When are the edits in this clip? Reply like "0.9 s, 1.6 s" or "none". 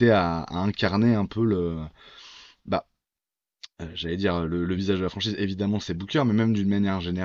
none

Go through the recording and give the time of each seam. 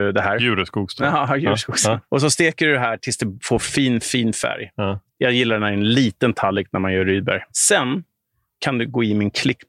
2.0 s, 5.1 s, 7.5 s

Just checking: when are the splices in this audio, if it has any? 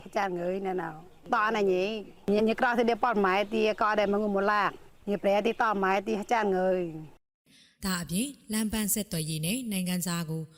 2.4 s

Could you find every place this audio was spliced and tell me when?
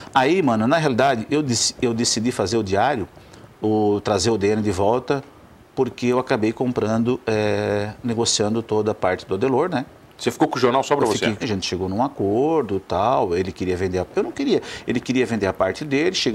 11.4 s

